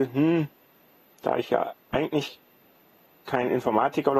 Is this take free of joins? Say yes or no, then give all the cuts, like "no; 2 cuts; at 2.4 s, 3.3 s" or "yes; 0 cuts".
yes; 0 cuts